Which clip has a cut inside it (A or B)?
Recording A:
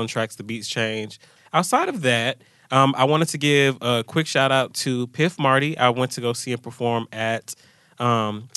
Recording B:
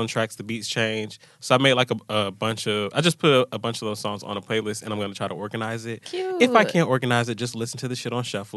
A